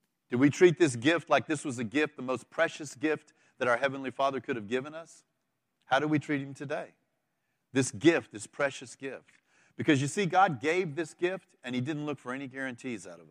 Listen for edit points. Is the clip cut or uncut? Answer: uncut